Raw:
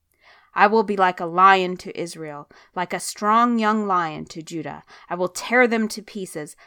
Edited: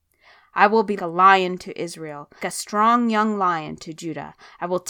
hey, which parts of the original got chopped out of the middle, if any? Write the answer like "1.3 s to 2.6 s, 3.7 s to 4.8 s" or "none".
1.0 s to 1.1 s, 2.6 s to 2.9 s